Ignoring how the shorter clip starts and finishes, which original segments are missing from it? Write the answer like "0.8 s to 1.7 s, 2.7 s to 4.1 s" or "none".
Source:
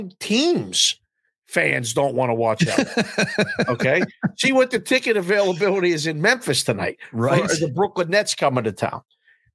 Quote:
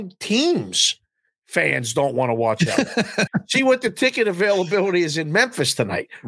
3.3 s to 4.2 s